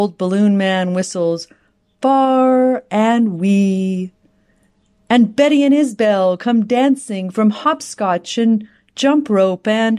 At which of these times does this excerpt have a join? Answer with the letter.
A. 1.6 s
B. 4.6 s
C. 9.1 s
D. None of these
D